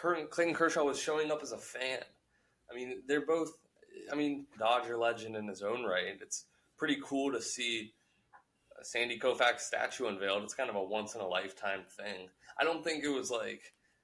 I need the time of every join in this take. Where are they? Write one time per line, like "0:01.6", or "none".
0:04.6